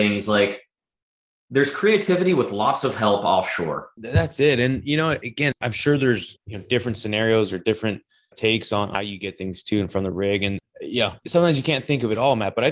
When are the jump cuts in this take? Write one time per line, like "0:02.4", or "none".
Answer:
0:03.9